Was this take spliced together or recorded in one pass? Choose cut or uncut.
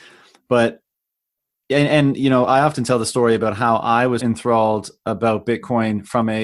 cut